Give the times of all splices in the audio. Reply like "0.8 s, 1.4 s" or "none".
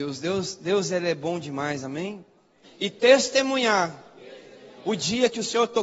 2.6 s